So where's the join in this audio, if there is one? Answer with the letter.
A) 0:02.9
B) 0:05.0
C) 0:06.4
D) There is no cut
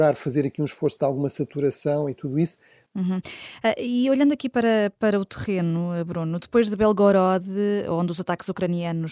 A